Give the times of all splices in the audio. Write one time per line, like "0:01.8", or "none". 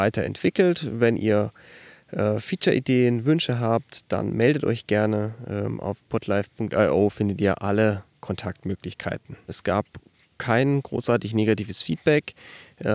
0:09.5